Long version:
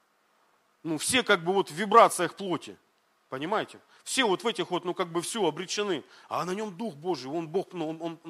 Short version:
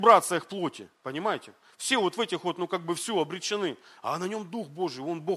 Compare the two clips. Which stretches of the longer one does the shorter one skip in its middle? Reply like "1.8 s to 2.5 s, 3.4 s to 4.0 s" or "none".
2.8 s to 3.2 s